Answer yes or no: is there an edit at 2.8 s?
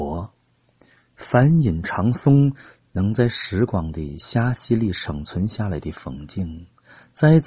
yes